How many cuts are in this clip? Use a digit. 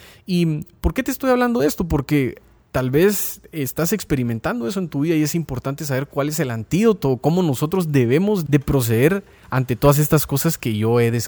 1